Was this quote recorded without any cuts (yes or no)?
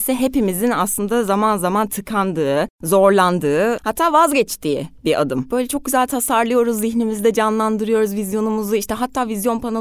yes